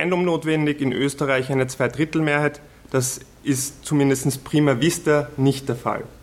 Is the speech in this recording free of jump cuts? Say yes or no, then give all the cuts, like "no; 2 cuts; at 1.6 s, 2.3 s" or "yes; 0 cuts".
yes; 0 cuts